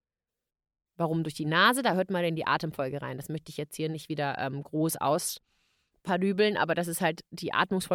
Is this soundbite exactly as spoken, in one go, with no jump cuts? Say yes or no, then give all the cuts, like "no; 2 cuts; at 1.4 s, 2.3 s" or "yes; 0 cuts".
yes; 0 cuts